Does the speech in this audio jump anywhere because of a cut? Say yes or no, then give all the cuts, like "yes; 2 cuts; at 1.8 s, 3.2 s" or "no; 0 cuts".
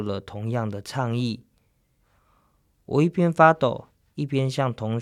no; 0 cuts